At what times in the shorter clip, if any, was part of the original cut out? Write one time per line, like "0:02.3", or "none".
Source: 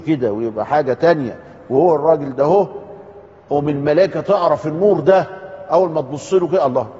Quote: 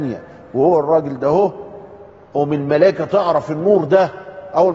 none